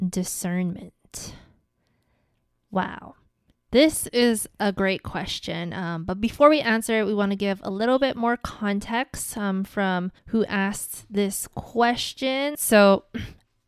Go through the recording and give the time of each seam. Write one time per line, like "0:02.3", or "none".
0:03.5
0:10.2
0:12.5